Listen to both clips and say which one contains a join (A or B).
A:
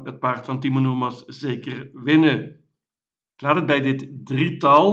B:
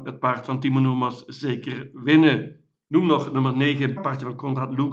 B